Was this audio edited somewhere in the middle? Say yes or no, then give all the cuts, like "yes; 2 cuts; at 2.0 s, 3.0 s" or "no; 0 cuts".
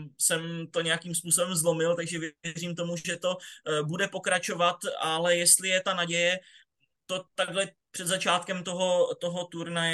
no; 0 cuts